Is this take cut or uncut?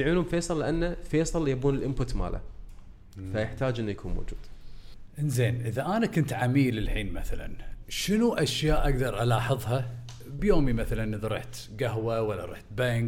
cut